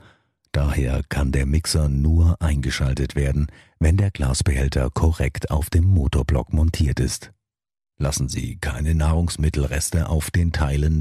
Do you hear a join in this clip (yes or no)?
yes